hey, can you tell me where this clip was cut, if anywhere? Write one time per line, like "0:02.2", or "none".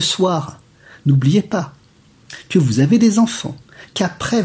none